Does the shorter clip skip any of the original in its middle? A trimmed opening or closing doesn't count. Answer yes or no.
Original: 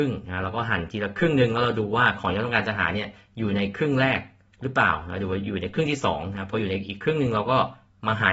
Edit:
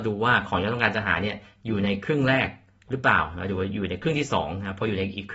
no